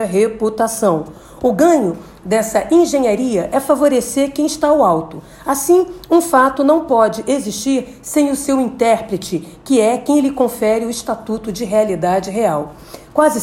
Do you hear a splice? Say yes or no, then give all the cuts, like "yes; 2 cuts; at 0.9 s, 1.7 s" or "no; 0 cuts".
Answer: no; 0 cuts